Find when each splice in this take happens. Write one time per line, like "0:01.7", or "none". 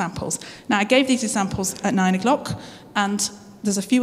none